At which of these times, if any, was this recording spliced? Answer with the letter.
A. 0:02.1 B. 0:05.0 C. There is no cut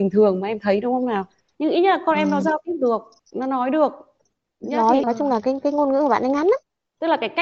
B